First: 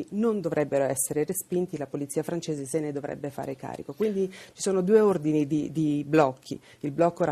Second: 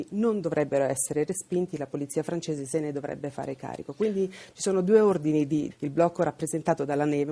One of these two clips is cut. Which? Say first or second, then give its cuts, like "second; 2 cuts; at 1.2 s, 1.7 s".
second; 1 cut; at 5.7 s